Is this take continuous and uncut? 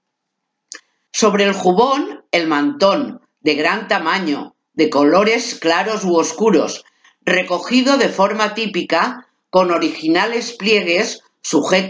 no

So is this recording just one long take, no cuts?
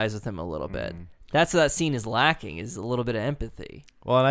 yes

